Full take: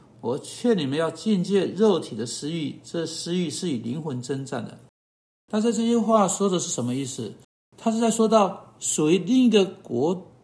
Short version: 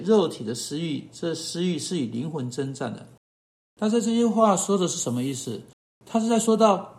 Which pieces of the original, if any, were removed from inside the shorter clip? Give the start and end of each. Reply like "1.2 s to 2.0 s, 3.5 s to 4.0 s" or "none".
none